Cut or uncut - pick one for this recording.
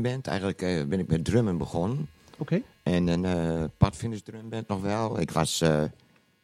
uncut